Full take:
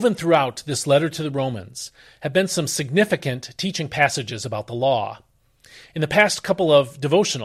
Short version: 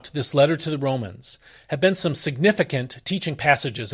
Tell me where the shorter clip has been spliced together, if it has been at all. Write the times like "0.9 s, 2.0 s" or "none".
none